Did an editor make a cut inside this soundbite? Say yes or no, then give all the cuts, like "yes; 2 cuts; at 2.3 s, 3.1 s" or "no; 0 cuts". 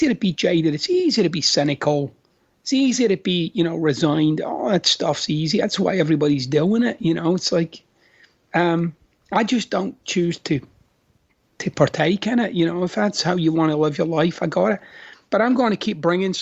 no; 0 cuts